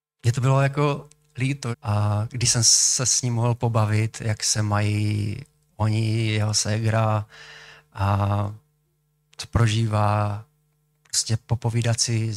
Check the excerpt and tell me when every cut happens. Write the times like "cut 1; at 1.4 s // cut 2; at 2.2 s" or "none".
cut 1; at 1.7 s